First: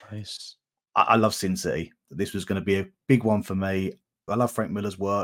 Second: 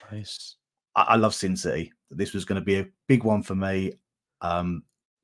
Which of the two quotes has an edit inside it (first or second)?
first